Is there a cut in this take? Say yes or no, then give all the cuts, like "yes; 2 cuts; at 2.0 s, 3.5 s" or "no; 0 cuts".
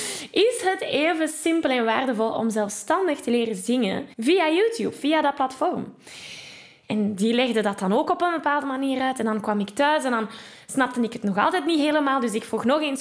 yes; 2 cuts; at 4.1 s, 6.8 s